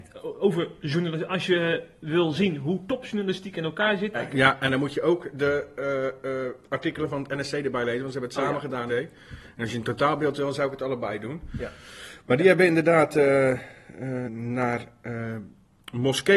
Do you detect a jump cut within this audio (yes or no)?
yes